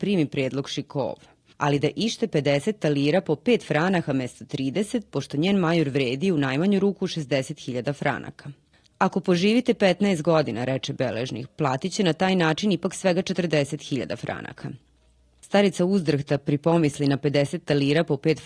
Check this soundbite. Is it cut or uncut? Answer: uncut